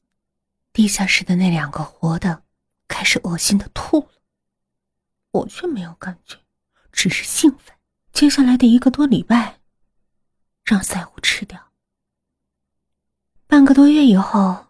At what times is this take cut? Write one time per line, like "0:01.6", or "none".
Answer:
0:08.1
0:10.5